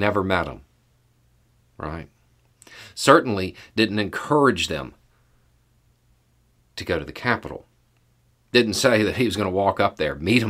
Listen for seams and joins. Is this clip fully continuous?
yes; 0 cuts

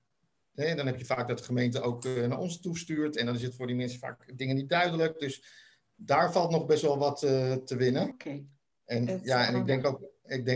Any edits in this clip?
yes; 1 cut; at 8.1 s

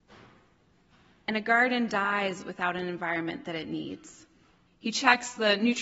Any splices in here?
yes; 1 cut; at 4.7 s

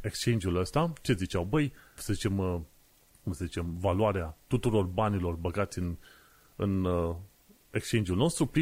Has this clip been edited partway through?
yes; 1 cut; at 2.0 s

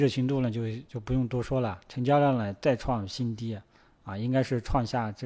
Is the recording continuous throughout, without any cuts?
yes; 0 cuts

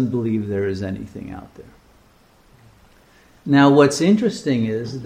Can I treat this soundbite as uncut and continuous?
yes; 0 cuts

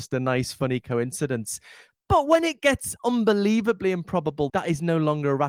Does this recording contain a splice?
yes; 1 cut; at 4.5 s

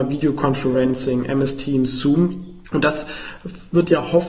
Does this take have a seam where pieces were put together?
yes; 1 cut; at 2.7 s

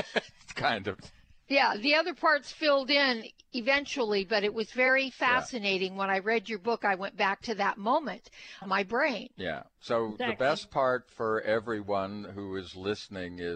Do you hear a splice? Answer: yes; 1 cut; at 8.6 s

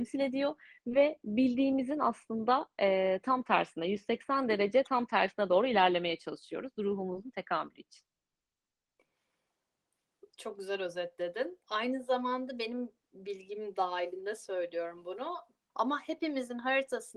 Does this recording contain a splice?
yes; 2 cuts; at 11.6 s, 15.7 s

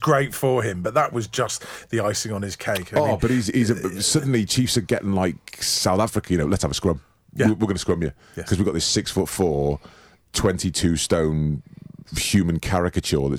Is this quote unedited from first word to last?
yes; 0 cuts

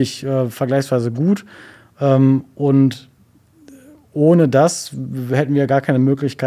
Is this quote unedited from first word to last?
yes; 0 cuts

